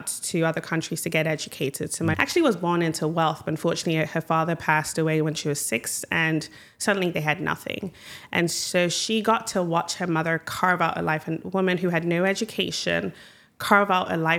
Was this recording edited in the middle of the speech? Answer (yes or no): yes